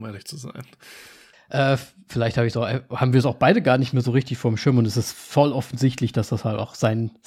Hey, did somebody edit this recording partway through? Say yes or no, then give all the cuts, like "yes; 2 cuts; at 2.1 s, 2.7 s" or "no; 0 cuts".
yes; 1 cut; at 1.3 s